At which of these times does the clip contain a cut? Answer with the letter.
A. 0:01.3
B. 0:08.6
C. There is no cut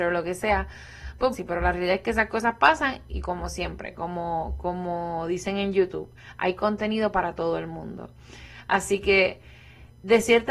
A